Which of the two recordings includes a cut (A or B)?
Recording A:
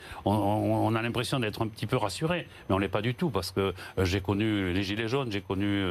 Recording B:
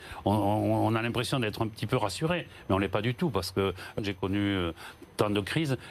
B